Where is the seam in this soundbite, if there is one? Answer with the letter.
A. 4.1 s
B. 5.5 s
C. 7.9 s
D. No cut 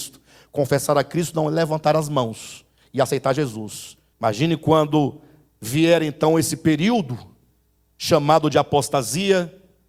A